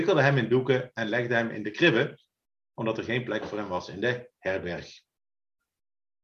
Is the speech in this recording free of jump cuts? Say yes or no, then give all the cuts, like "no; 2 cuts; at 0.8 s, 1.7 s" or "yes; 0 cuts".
yes; 0 cuts